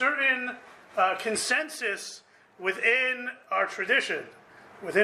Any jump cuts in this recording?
no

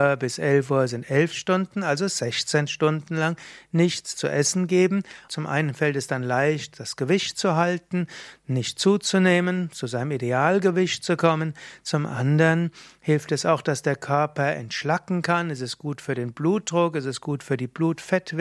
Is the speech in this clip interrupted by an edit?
yes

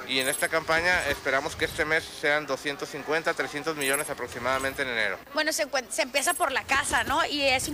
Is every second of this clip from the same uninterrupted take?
no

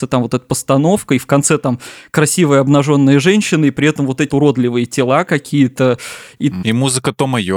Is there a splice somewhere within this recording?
yes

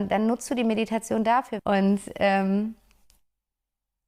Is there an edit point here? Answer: yes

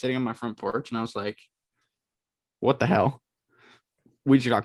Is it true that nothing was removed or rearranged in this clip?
yes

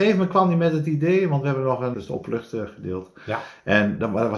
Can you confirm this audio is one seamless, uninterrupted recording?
no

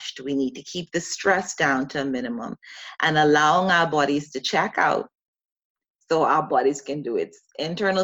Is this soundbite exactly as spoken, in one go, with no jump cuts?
yes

